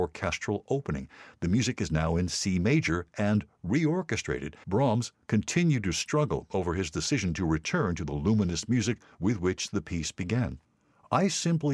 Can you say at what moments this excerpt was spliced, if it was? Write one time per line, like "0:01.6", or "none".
0:04.6